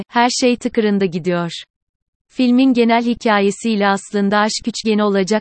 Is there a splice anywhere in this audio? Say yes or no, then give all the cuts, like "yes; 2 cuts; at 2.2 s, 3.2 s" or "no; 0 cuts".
no; 0 cuts